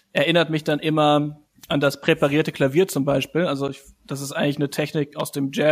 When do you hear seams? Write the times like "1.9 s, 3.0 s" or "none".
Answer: none